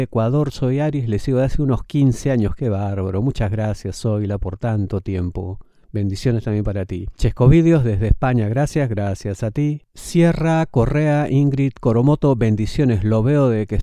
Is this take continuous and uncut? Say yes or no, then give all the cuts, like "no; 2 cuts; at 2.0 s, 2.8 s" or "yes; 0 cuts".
yes; 0 cuts